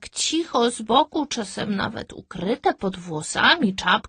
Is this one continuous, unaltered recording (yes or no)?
yes